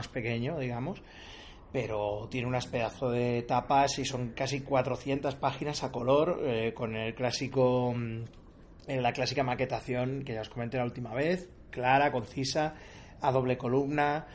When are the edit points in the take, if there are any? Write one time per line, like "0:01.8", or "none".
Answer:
none